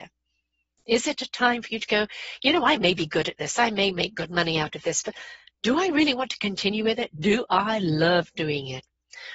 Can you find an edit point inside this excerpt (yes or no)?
no